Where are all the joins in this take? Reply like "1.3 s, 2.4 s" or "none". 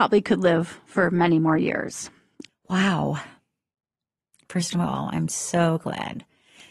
2.5 s